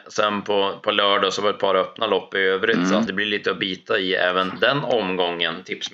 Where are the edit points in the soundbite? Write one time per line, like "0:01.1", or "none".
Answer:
0:03.1